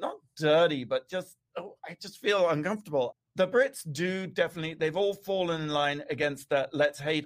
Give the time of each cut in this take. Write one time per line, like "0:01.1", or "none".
0:03.1